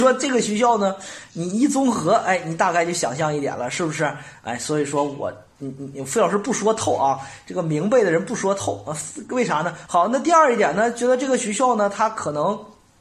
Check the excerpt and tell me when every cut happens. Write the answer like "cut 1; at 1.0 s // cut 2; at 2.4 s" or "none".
cut 1; at 9.9 s